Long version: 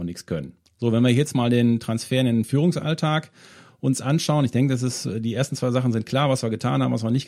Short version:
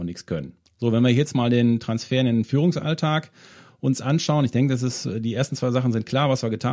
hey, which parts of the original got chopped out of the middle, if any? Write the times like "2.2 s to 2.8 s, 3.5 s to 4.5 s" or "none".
none

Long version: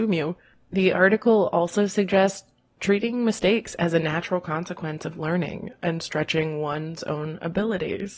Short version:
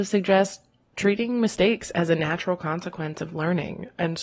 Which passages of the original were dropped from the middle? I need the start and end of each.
none

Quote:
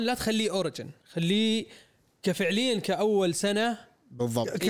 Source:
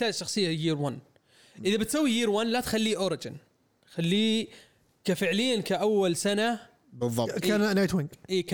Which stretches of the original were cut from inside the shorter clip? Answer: 3.5 s to 3.8 s

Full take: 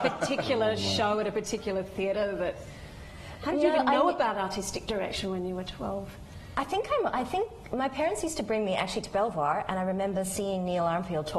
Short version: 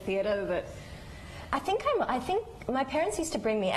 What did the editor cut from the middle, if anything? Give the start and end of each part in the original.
3.4 s to 6.5 s

